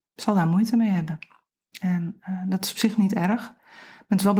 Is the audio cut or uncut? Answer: uncut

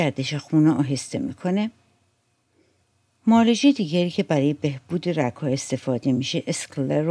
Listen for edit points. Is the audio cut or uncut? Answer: uncut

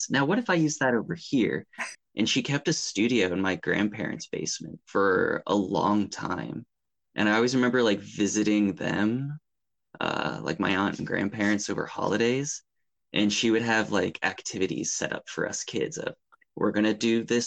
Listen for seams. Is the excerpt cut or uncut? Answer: cut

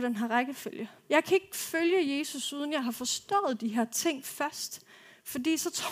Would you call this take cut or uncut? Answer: cut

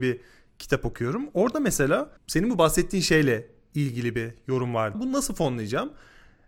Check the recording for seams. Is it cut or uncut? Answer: cut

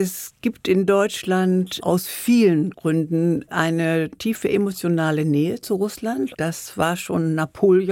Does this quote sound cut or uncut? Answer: cut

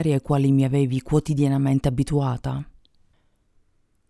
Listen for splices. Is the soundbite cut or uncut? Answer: uncut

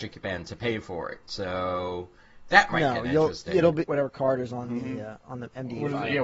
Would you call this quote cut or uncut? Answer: cut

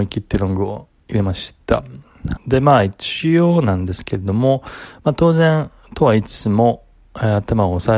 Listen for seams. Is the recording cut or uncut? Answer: cut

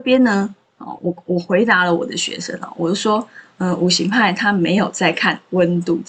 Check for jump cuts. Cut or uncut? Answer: uncut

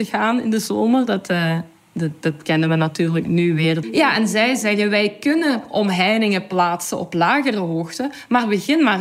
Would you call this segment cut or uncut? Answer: cut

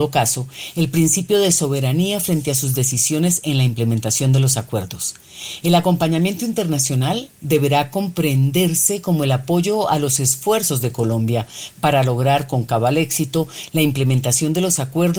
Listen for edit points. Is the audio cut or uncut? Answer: cut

